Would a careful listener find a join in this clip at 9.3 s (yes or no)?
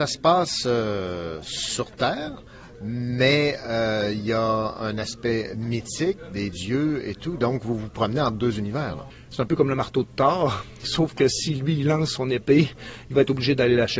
yes